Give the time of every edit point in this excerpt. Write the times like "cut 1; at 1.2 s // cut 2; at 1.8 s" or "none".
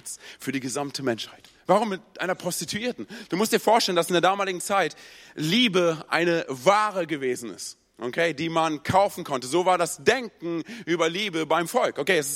cut 1; at 1.6 s